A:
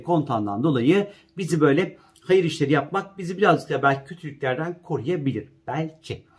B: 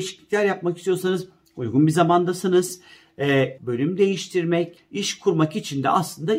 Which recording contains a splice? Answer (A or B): B